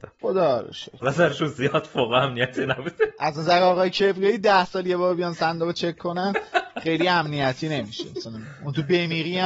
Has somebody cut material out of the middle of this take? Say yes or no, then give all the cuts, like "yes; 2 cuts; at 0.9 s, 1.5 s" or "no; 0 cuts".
yes; 1 cut; at 1.0 s